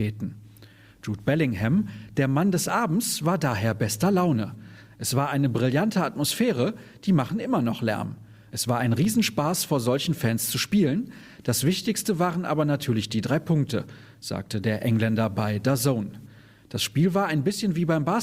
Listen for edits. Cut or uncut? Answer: uncut